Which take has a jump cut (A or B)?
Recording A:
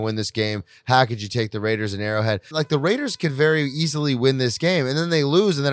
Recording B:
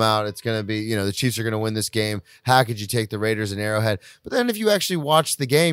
A